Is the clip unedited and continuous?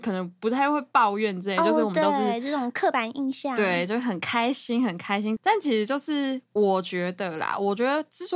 no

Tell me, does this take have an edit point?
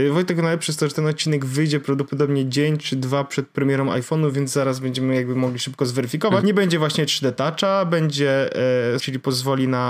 yes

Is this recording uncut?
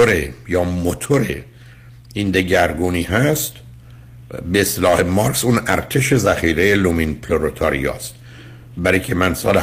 yes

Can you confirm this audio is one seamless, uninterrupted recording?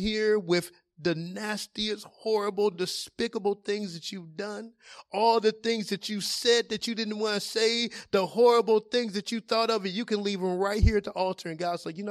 yes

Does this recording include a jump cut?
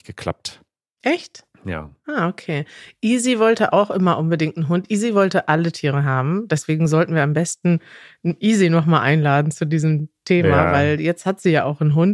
no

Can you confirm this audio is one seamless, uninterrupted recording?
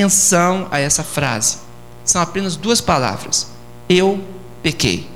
yes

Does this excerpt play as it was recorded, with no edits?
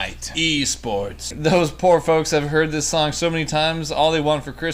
no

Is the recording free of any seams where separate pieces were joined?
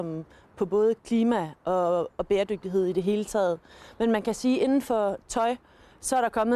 yes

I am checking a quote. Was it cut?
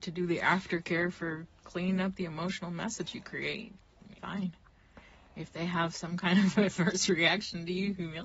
yes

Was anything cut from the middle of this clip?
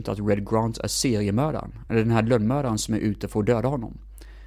no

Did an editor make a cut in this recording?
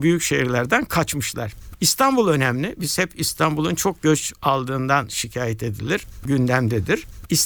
no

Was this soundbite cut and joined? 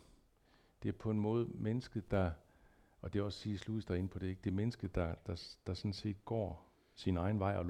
no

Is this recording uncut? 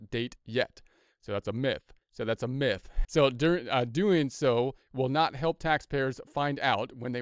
no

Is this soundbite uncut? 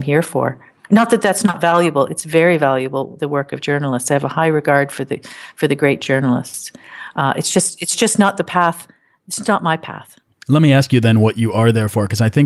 yes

